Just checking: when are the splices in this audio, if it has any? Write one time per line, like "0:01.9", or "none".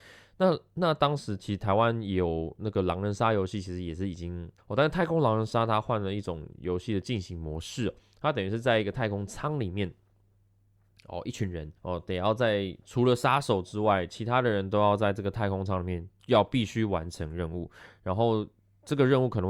0:04.6
0:11.8